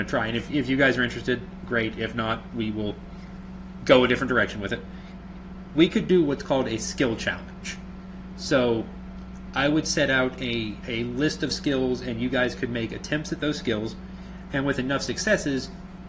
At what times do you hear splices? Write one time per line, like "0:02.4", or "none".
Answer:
none

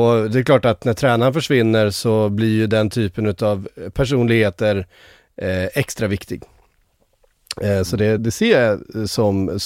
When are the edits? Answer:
0:08.2

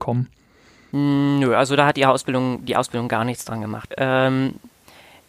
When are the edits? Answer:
0:03.9

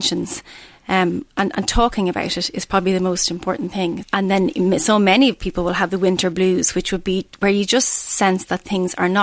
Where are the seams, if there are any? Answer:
0:04.0

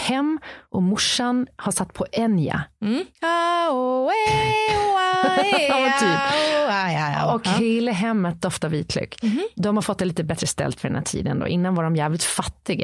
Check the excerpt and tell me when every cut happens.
0:03.1

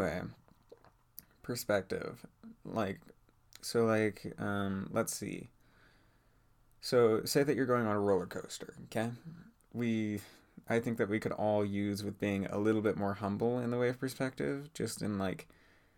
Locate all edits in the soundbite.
0:09.6

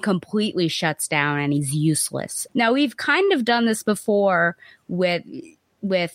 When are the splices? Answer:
0:02.5

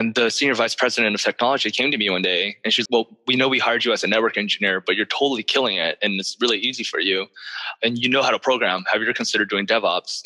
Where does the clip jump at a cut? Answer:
0:02.9

